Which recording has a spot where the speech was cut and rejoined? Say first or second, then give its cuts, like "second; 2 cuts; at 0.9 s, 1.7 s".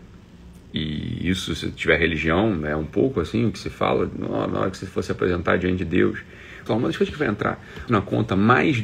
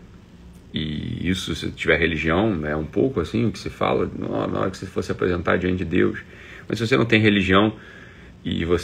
first; 2 cuts; at 6.7 s, 7.9 s